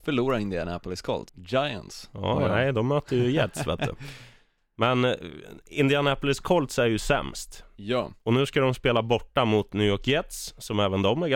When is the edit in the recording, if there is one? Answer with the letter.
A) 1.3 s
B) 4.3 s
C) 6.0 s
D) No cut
A